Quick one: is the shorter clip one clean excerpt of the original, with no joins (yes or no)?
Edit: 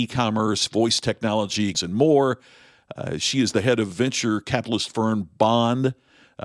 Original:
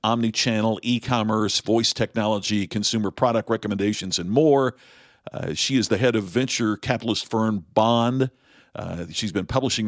no